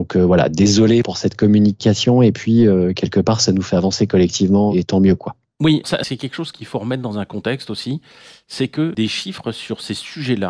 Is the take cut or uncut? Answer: cut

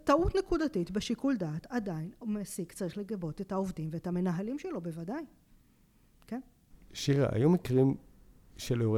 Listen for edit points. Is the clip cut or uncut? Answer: uncut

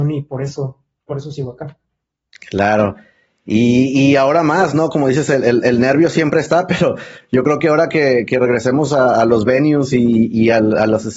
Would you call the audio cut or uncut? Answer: uncut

